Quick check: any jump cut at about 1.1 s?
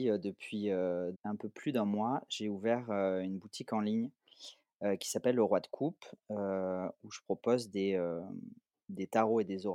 yes; 1 cut; at 1.1 s

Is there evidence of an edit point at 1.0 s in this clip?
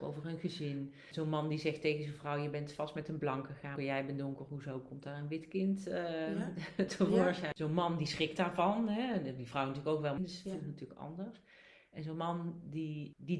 no; 3 cuts; at 3.8 s, 7.5 s, 10.2 s

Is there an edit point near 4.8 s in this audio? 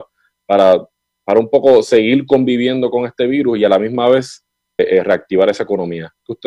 yes; 1 cut; at 4.8 s

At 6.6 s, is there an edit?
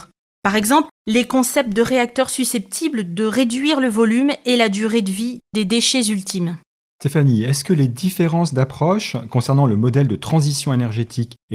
no; 0 cuts

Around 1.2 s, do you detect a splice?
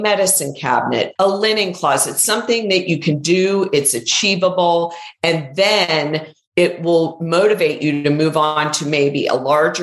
yes; 1 cut; at 1.2 s

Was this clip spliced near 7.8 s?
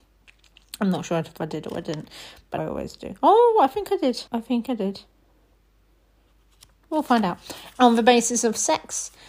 yes; 3 cuts; at 2.6 s, 4.3 s, 7.8 s

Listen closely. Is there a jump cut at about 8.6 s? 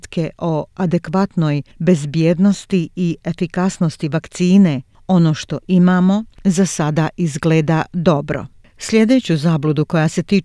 no; 0 cuts

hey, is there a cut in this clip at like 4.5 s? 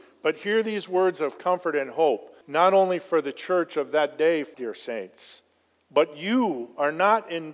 yes; 2 cuts; at 2.4 s, 4.5 s

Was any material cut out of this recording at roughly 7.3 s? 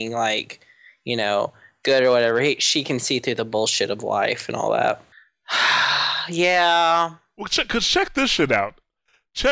no; 1 cut; at 5.1 s

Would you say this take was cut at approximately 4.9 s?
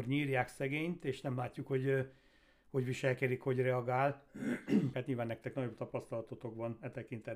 yes; 1 cut; at 4.9 s

